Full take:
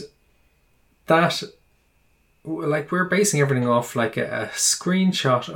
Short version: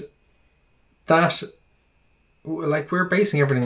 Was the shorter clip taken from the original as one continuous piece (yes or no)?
yes